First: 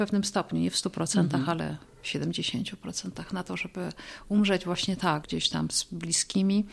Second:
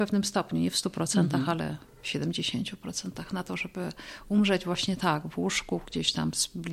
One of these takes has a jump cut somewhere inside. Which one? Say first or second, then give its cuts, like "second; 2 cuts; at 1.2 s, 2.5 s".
first; 1 cut; at 5.2 s